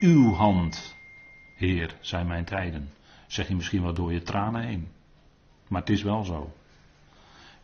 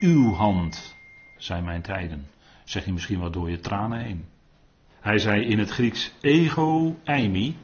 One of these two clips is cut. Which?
second; 2 cuts; at 1.4 s, 4.9 s

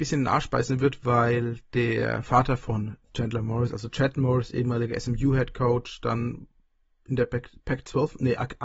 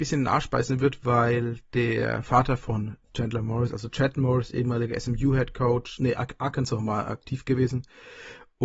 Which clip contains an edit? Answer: second; 1 cut; at 6.0 s

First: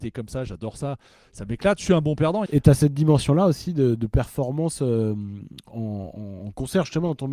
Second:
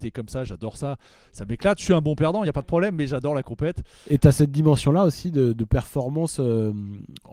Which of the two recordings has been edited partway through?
first; 1 cut; at 2.5 s

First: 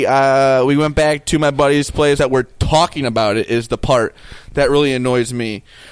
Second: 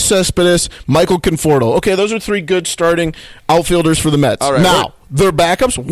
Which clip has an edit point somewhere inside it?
first; 1 cut; at 2.2 s

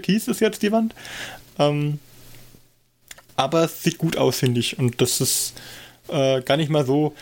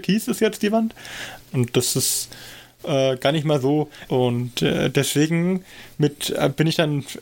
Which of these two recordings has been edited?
second; 2 cuts; at 1.5 s, 4.1 s

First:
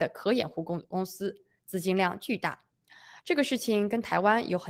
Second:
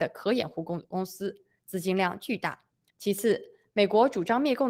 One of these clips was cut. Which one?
second; 1 cut; at 2.9 s

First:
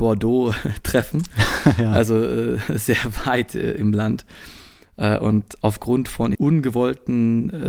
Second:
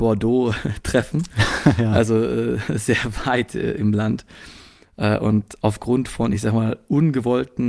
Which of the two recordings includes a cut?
first; 1 cut; at 6.3 s

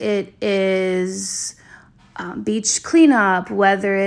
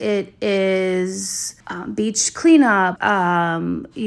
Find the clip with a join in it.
second; 2 cuts; at 1.6 s, 3.0 s

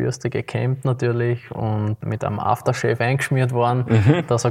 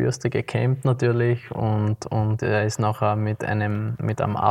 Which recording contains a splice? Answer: first; 1 cut; at 2.0 s

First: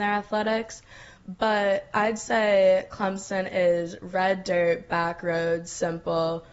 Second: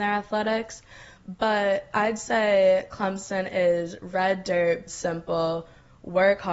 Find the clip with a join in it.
second; 1 cut; at 4.9 s

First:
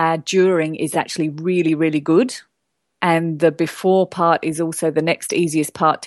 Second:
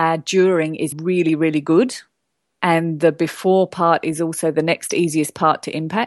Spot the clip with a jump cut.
second; 1 cut; at 0.9 s

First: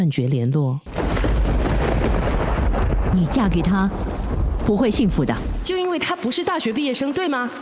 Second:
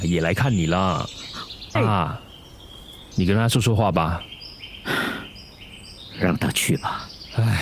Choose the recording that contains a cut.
second; 2 cuts; at 1.8 s, 3.1 s

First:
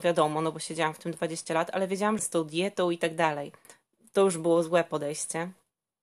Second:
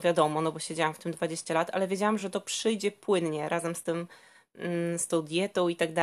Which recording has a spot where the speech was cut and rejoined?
first; 1 cut; at 2.2 s

